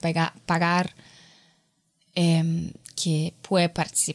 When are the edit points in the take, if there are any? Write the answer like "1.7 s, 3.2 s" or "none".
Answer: none